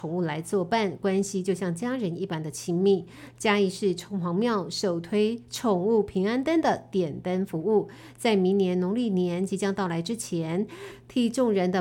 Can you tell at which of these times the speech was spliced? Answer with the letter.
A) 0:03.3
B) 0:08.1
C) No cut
C